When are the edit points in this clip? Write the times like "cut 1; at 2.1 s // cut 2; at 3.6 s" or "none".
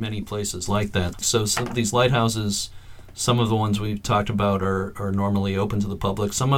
cut 1; at 1.2 s